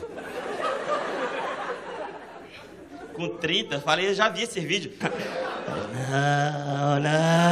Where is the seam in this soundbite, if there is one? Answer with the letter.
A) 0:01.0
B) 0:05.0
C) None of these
B